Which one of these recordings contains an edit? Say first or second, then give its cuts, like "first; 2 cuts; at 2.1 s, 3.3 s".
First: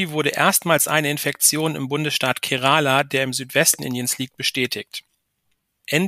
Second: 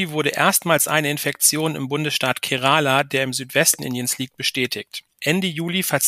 second; 1 cut; at 5.1 s